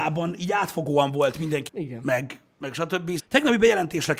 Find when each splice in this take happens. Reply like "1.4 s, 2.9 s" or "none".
1.7 s, 3.2 s